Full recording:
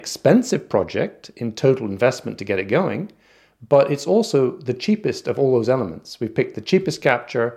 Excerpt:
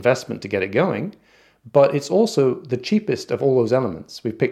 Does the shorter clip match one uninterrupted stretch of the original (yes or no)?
yes